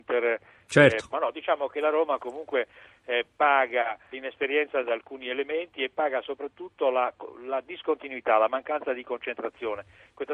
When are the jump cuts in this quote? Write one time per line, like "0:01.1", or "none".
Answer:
0:01.1
0:04.1

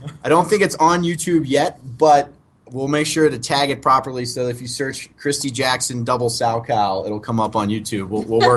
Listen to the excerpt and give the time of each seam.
none

